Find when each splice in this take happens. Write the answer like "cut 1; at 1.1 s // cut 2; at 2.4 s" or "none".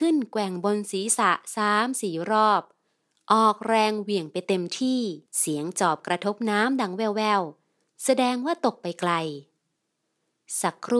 cut 1; at 5.3 s